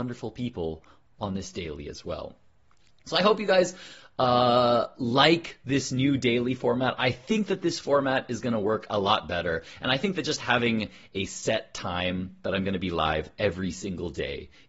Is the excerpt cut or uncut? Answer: uncut